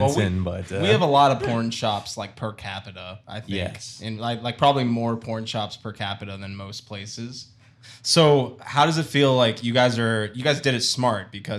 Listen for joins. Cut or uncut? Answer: uncut